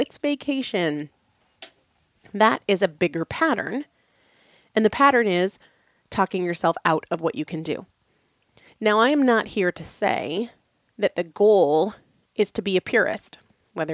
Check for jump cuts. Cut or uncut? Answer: uncut